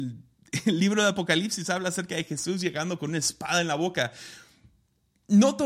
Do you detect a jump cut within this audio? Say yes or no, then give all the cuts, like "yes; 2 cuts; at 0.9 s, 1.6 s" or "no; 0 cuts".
no; 0 cuts